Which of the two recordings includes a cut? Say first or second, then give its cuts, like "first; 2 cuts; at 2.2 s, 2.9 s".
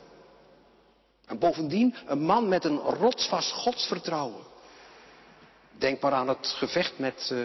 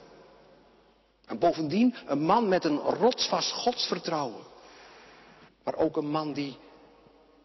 second; 1 cut; at 5.5 s